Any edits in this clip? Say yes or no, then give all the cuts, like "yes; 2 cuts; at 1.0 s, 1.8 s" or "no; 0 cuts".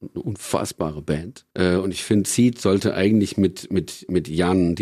no; 0 cuts